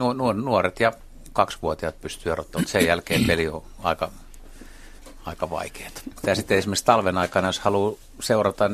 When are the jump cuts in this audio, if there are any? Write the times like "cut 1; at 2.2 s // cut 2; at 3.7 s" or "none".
cut 1; at 6.2 s